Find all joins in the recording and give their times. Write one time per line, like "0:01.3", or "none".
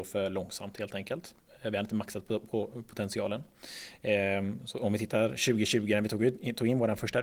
none